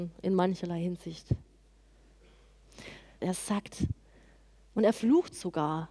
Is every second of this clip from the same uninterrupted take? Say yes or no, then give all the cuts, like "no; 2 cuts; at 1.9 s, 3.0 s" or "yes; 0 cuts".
no; 1 cut; at 3.2 s